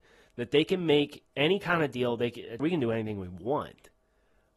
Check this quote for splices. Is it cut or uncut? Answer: cut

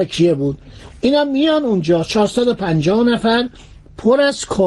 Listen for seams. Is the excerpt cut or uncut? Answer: uncut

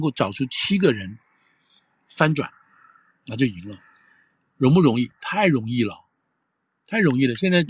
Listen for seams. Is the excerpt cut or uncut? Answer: uncut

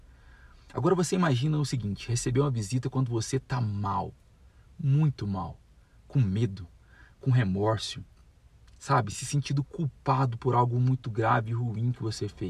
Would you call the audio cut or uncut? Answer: uncut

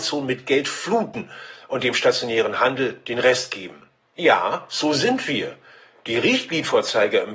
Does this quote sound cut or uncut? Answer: uncut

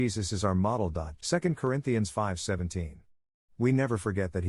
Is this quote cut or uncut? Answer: cut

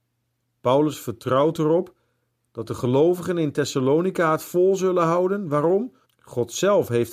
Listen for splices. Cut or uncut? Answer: cut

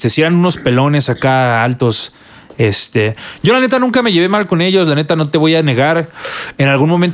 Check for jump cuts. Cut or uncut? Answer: uncut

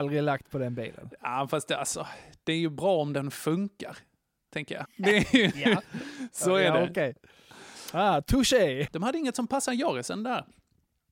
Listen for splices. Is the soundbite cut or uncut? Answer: cut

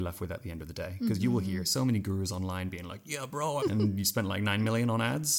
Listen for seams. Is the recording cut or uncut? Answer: cut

